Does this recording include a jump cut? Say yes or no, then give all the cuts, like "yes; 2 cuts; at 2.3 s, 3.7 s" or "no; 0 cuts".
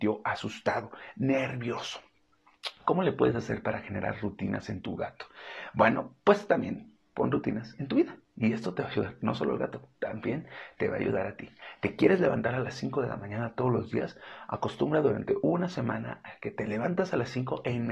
yes; 1 cut; at 8.2 s